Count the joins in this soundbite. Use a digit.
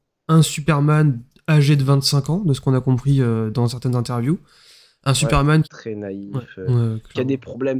1